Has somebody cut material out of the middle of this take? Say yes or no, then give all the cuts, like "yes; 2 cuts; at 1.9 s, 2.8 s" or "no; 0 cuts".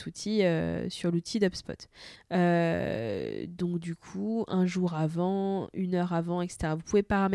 yes; 1 cut; at 2.2 s